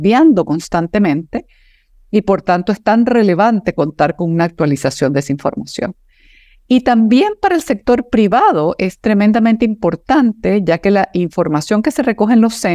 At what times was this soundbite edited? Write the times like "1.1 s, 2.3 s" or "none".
none